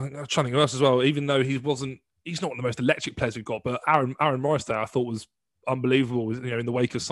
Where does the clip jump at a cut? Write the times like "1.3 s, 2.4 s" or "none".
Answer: none